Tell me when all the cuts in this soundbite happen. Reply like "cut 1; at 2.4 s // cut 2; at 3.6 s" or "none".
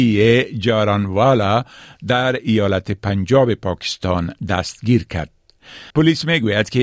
cut 1; at 5.9 s